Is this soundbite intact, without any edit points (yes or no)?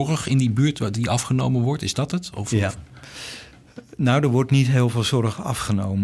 yes